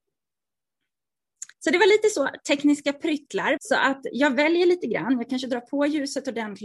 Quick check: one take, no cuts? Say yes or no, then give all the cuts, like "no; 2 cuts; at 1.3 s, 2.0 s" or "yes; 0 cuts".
no; 2 cuts; at 1.5 s, 3.6 s